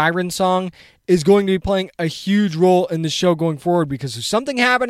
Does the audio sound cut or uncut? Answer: uncut